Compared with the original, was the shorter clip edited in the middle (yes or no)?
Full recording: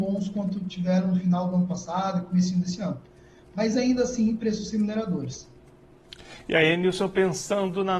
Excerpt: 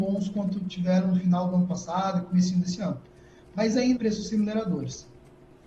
yes